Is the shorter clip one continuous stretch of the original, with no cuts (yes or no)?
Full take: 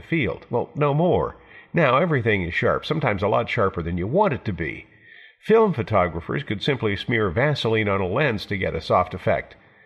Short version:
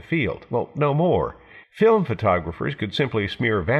no